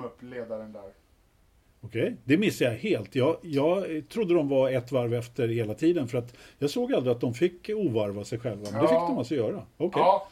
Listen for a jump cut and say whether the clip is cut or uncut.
uncut